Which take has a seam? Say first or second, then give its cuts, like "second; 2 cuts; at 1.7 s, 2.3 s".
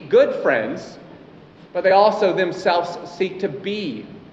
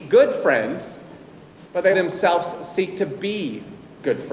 second; 1 cut; at 1.9 s